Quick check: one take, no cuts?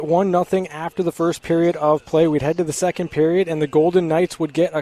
yes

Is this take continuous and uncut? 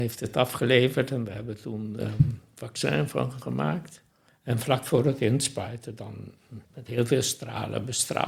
no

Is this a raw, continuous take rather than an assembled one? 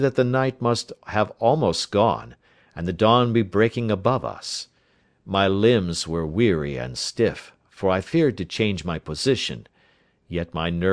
yes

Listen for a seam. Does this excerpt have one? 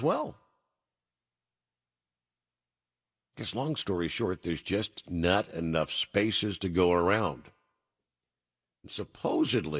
no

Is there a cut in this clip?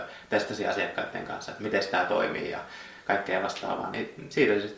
no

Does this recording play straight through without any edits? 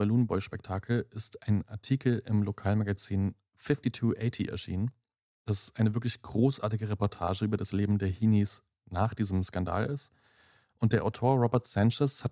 yes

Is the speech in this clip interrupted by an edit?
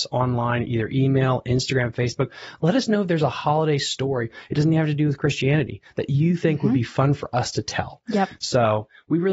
no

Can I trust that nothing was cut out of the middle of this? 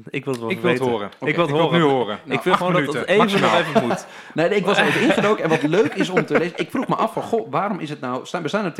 yes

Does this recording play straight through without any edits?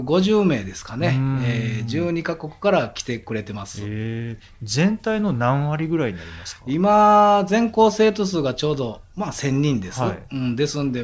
yes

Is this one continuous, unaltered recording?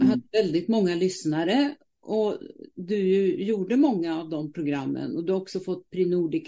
yes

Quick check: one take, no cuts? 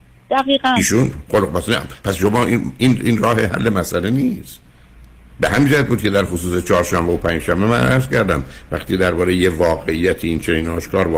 yes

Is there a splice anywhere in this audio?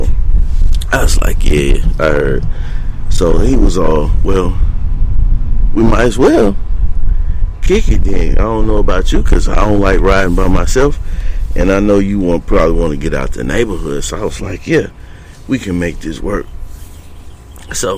no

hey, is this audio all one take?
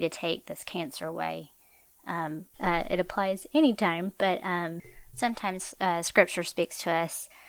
no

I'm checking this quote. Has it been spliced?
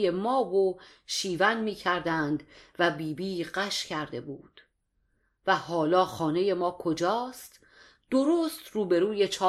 no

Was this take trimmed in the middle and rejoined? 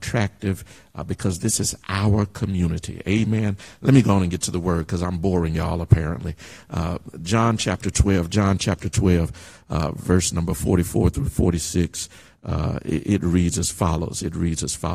no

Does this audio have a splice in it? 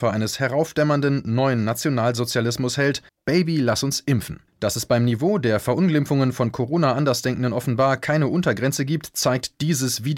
yes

